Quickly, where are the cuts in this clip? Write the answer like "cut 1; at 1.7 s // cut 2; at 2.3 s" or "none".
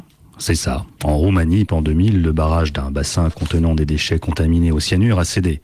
cut 1; at 1.7 s